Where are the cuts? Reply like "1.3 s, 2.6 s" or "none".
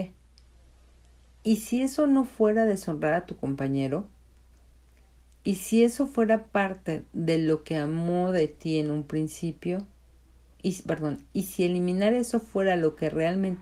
10.5 s